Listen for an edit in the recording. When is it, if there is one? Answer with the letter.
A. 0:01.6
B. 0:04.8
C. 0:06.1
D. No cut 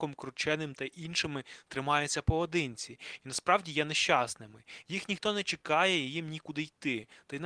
D